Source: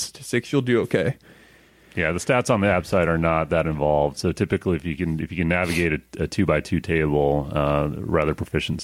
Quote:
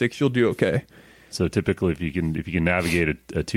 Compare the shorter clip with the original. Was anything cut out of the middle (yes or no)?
yes